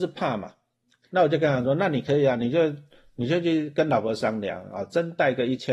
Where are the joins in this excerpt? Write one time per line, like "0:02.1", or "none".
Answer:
0:01.0